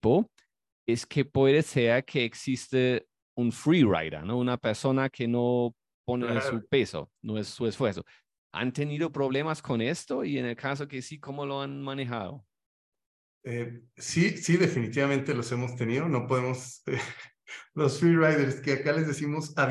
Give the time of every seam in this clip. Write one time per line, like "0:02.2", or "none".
none